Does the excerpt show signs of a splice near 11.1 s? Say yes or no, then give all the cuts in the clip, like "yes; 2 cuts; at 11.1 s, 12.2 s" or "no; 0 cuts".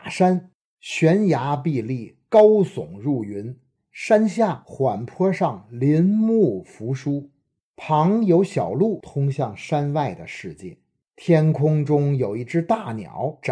no; 1 cut; at 3.7 s